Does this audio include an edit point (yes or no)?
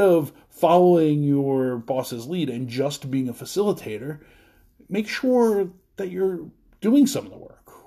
no